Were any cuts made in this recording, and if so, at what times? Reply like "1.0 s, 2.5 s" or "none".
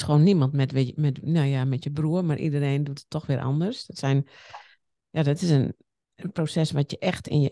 none